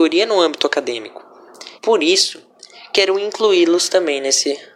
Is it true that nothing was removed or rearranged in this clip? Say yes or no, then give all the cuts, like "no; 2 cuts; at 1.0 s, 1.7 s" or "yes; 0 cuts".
no; 1 cut; at 1.8 s